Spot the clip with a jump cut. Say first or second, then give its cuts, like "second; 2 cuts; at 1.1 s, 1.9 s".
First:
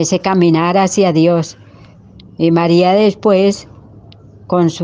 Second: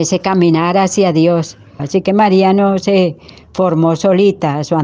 second; 1 cut; at 1.8 s